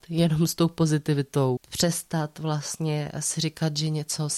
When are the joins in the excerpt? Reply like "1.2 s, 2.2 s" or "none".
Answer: 1.6 s